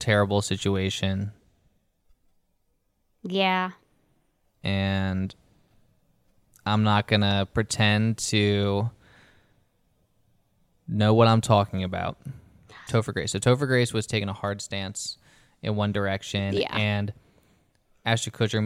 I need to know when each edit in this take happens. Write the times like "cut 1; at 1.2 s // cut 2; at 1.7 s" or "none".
cut 1; at 12.9 s